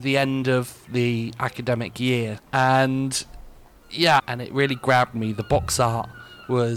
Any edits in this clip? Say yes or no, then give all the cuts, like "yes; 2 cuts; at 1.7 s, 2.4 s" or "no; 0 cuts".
yes; 2 cuts; at 2.4 s, 4.2 s